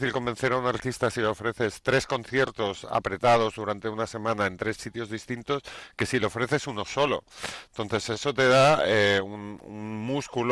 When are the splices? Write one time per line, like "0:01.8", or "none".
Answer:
none